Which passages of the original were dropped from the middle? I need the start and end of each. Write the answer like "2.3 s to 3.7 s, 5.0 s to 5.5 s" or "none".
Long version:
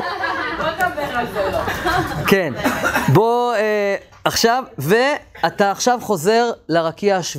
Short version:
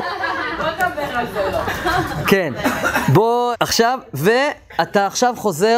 3.5 s to 4.2 s